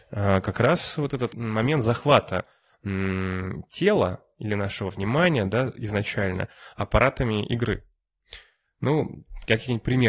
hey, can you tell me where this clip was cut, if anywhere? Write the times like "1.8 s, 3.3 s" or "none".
1.3 s